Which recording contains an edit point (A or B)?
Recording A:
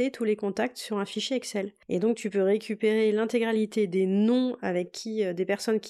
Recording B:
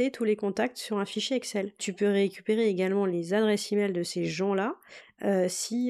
B